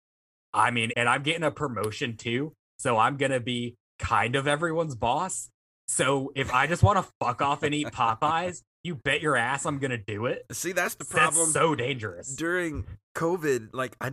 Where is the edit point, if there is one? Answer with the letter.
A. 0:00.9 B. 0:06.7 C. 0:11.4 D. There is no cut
A